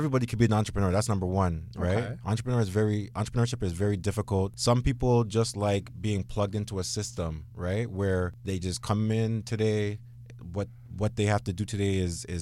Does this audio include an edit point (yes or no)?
no